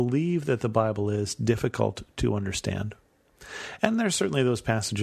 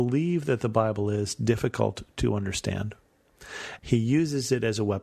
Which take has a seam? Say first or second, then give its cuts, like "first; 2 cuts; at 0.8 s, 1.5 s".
second; 1 cut; at 3.8 s